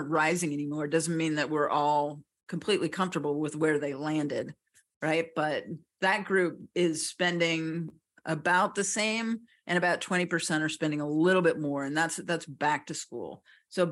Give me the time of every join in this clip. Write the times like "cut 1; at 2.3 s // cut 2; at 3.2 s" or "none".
none